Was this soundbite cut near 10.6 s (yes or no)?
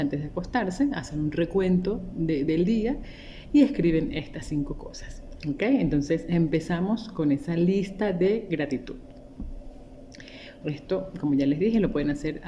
yes